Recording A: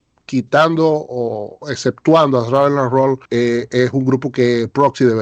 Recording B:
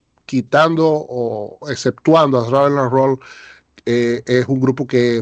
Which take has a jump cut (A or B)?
A